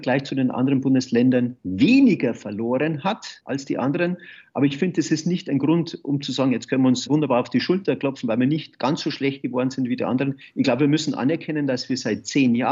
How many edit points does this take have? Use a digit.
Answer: 0